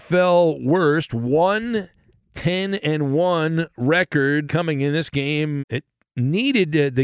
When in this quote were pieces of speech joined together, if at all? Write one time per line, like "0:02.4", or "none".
0:04.4
0:05.6